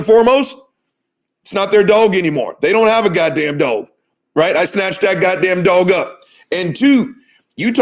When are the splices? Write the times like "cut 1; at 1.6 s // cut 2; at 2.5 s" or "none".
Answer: none